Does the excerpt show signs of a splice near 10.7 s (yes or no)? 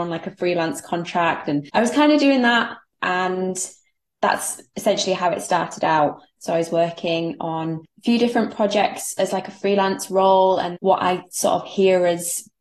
yes